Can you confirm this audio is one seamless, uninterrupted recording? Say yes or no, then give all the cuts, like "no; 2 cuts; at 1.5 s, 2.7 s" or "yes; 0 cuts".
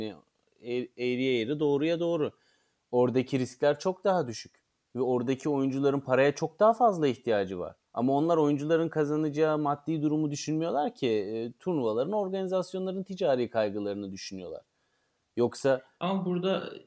no; 1 cut; at 7.9 s